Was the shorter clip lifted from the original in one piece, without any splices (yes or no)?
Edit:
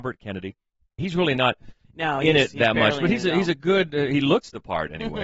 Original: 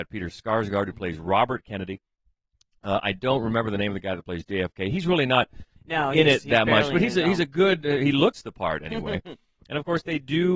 no